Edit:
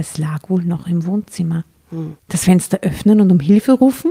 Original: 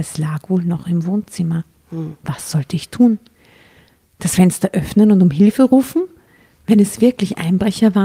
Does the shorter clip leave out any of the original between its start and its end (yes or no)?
yes